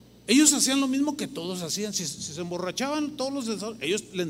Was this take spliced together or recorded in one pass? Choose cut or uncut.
uncut